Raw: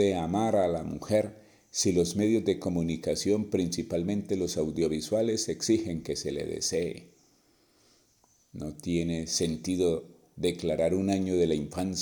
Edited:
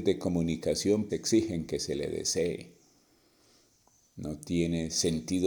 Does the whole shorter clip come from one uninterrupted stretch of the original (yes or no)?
no